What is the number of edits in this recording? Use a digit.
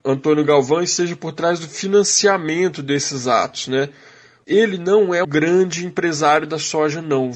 1